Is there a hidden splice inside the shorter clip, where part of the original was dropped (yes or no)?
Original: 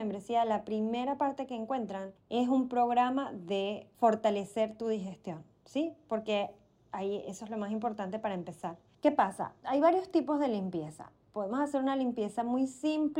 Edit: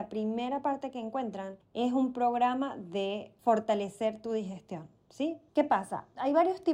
yes